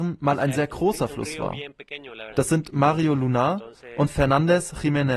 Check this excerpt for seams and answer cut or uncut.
cut